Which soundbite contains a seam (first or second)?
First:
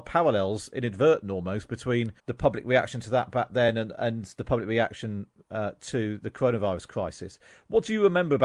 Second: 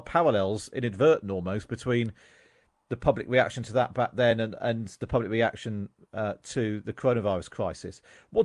first